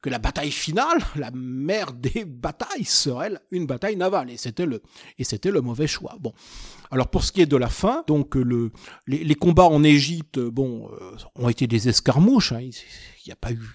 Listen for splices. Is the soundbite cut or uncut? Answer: uncut